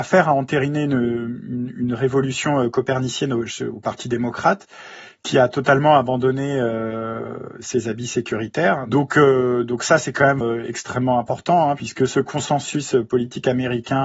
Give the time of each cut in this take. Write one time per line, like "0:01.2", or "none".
0:10.4